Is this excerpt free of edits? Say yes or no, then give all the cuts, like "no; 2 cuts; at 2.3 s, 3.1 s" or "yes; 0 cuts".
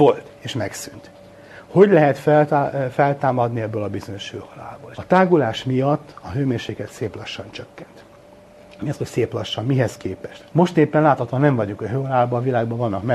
no; 2 cuts; at 4.9 s, 10.5 s